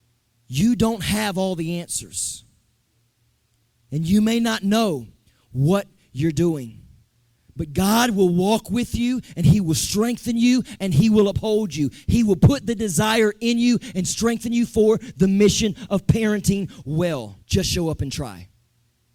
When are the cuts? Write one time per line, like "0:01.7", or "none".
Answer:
0:17.4